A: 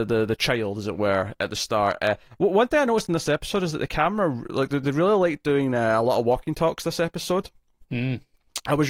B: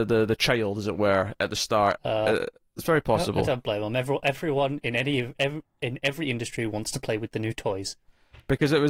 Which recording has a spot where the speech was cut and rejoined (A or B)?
B